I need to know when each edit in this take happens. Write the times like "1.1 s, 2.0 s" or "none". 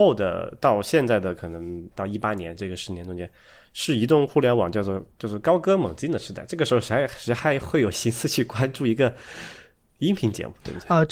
1.9 s